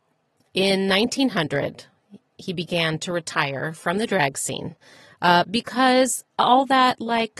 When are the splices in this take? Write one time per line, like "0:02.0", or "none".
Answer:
none